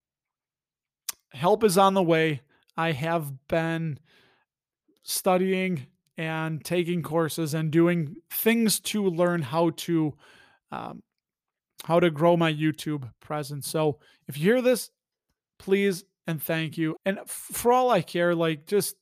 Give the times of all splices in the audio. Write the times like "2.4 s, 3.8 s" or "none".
17.0 s